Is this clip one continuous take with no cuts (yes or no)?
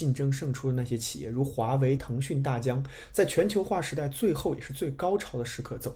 yes